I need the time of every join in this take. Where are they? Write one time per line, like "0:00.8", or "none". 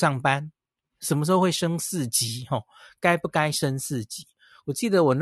0:01.0